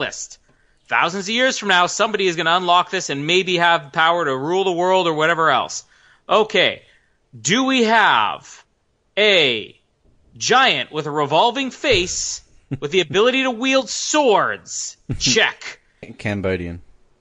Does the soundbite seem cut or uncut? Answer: cut